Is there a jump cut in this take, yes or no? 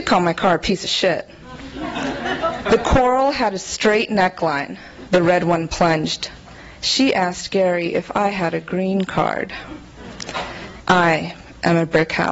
yes